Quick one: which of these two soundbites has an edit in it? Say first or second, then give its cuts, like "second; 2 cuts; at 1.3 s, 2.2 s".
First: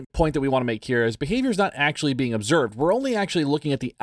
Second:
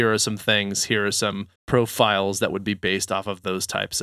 second; 1 cut; at 1.6 s